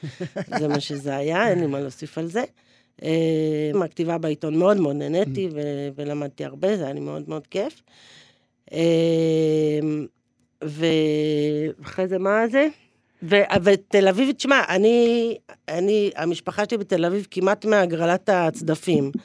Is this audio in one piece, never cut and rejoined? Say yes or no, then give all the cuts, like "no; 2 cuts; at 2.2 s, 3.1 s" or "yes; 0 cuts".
no; 1 cut; at 3.7 s